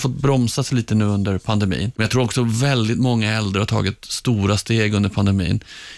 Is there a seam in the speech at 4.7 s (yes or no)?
no